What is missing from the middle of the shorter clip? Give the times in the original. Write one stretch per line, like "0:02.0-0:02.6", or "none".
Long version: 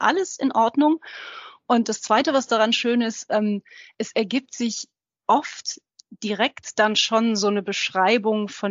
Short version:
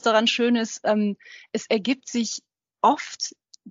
none